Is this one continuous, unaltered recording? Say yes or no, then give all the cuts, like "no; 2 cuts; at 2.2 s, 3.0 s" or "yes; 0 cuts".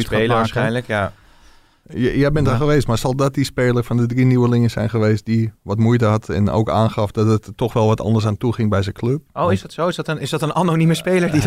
yes; 0 cuts